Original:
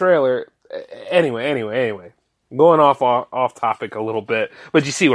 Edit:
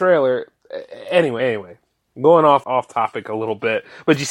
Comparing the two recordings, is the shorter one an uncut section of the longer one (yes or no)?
no